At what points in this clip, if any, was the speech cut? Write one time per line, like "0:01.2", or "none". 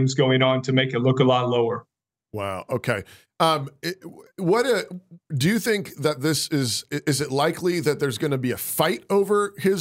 none